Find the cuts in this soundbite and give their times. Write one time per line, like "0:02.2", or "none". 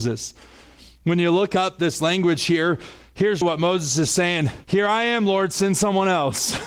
0:03.4
0:04.6